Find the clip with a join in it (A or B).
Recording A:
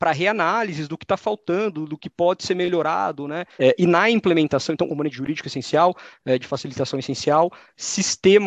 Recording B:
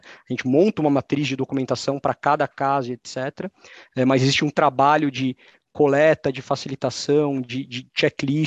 A